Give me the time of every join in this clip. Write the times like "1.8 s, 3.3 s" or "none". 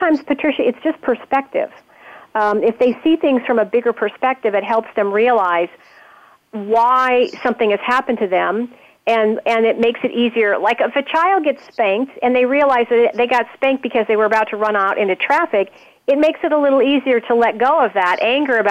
none